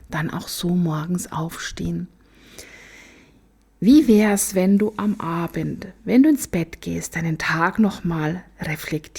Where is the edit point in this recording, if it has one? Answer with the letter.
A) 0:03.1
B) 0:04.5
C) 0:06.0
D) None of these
D